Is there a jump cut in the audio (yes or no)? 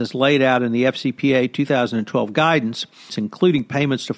yes